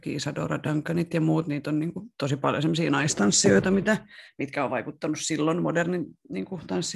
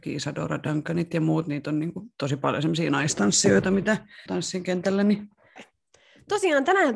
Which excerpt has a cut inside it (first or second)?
second